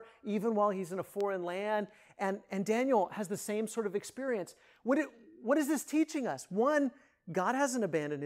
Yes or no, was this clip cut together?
no